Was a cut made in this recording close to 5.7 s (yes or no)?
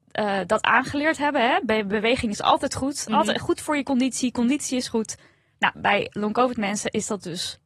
yes